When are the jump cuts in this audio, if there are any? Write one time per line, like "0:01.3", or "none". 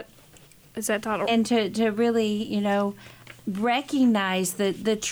0:01.3
0:03.4